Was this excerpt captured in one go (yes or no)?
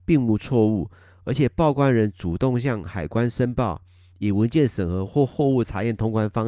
yes